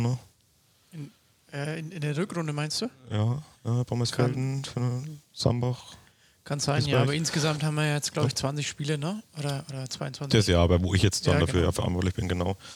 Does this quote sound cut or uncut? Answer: uncut